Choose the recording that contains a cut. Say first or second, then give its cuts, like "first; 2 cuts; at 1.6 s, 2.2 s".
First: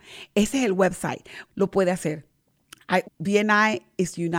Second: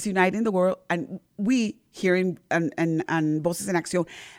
first; 2 cuts; at 1.5 s, 3.0 s